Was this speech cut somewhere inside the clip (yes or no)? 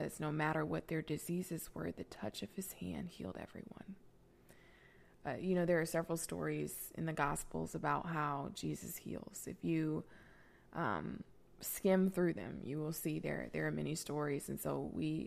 no